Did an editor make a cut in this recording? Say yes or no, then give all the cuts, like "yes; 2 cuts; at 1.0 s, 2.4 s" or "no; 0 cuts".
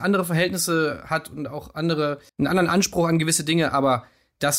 yes; 1 cut; at 2.3 s